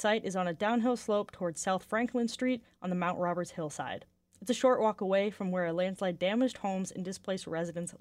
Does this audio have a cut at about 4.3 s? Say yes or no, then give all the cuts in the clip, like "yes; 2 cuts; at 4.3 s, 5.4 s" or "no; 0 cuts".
no; 0 cuts